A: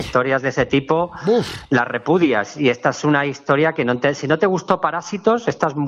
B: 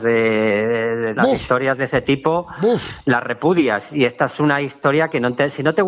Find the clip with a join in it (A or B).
B